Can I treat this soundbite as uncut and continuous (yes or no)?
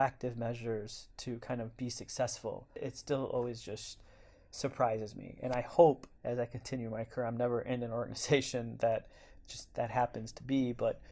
no